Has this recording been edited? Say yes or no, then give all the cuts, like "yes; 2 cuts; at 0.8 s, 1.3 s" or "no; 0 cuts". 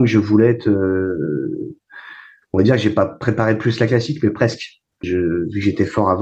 yes; 1 cut; at 5.0 s